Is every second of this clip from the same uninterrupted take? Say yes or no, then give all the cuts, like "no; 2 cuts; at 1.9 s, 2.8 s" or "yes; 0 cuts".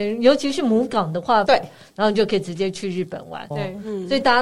no; 2 cuts; at 1.5 s, 3.5 s